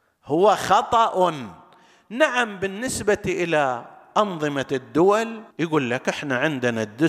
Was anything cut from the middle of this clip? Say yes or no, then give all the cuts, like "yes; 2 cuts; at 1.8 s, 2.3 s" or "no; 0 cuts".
yes; 1 cut; at 5.5 s